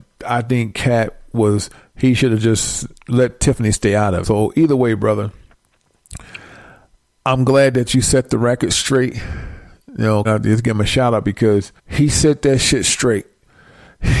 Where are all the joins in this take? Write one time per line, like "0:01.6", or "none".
0:04.2
0:10.2
0:11.8